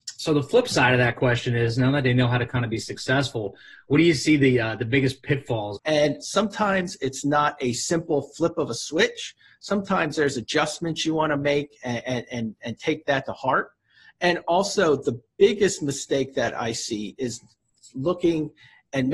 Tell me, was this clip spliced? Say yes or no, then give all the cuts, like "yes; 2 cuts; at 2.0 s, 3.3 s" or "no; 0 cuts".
yes; 1 cut; at 5.8 s